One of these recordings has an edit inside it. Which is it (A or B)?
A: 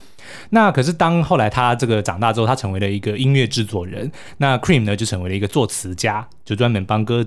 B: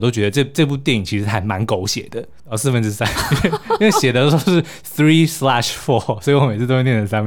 B